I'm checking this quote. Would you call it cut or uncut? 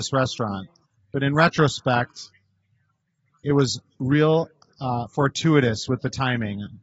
cut